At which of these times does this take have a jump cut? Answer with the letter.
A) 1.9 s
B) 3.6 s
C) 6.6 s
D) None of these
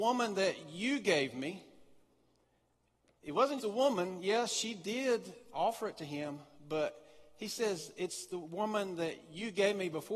B